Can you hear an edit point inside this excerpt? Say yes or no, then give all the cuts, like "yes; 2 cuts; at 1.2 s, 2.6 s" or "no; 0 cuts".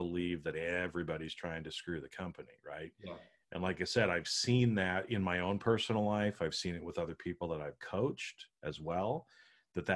no; 0 cuts